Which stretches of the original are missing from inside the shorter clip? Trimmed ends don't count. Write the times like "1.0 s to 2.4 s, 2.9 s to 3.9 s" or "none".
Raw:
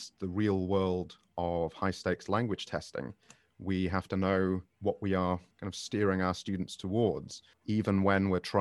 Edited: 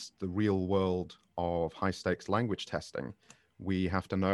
none